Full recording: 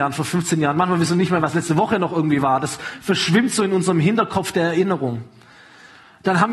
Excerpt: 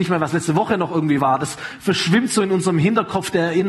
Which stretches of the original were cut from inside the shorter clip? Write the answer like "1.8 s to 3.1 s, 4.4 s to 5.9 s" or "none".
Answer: none